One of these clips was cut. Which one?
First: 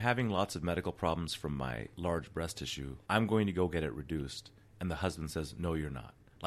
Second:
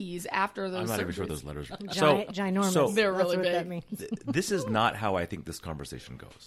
second; 1 cut; at 1.7 s

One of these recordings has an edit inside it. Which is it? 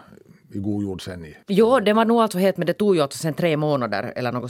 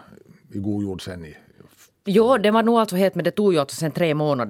first; 1 cut; at 1.4 s

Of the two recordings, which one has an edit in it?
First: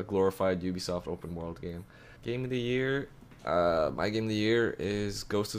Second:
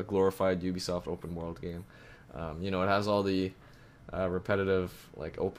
first; 1 cut; at 2.2 s

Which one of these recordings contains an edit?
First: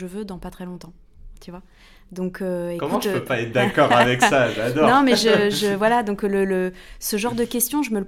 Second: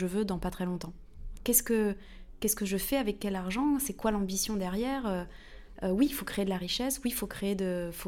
second; 1 cut; at 1.4 s

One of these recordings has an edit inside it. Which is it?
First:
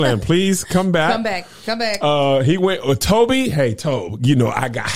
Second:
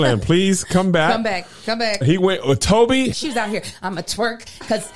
second; 2 cuts; at 2.0 s, 3.1 s

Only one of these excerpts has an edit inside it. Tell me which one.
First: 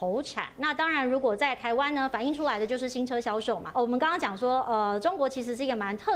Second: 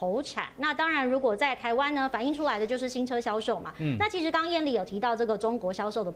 first; 1 cut; at 3.7 s

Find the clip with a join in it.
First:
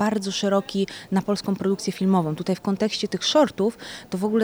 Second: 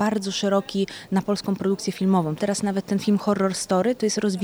second; 1 cut; at 2.4 s

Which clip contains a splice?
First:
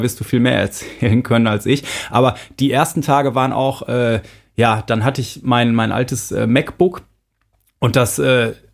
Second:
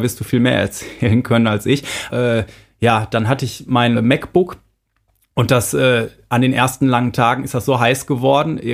second; 2 cuts; at 2.1 s, 4.0 s

